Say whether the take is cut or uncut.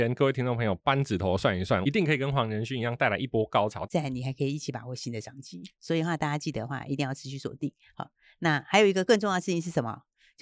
cut